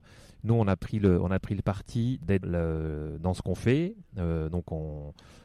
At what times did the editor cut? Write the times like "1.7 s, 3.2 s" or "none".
2.4 s